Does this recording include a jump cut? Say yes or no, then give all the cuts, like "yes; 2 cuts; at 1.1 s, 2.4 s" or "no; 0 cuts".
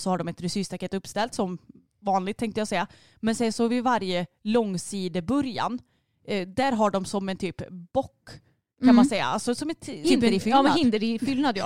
yes; 1 cut; at 10.0 s